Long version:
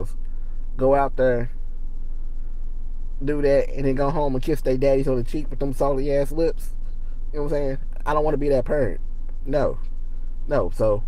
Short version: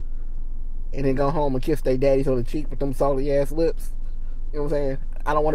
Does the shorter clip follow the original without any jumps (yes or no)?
no